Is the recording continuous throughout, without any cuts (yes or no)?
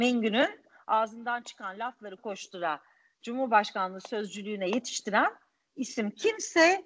no